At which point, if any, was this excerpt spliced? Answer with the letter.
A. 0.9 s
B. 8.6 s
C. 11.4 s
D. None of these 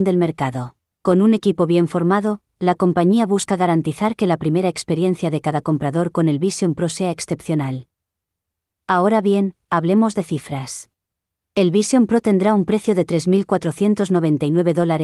A